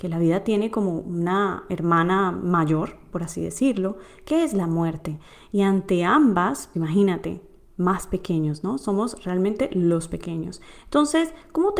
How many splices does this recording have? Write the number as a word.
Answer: one